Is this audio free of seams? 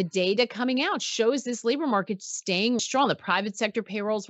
no; 1 cut; at 2.8 s

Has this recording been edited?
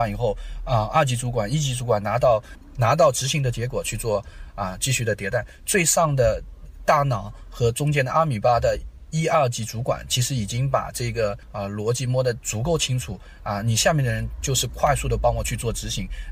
yes; 1 cut; at 5.6 s

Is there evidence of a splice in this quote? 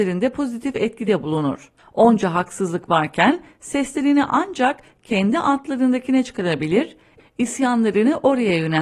yes; 1 cut; at 1.8 s

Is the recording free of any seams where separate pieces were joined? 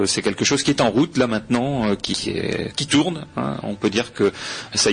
no; 1 cut; at 2.1 s

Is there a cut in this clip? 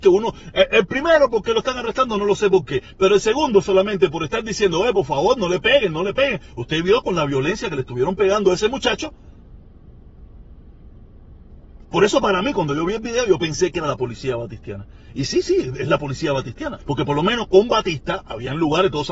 yes; 2 cuts; at 11.8 s, 16.8 s

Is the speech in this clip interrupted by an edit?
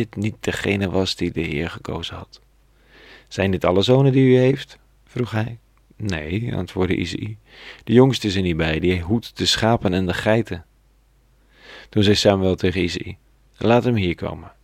no; 0 cuts

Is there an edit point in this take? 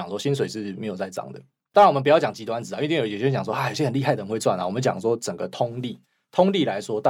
no; 0 cuts

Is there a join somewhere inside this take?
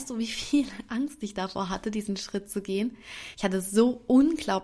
no; 0 cuts

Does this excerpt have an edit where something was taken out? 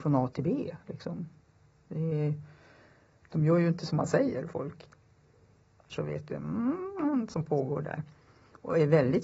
yes; 1 cut; at 5.9 s

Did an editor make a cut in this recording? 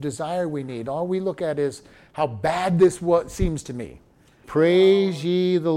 yes; 1 cut; at 4.4 s

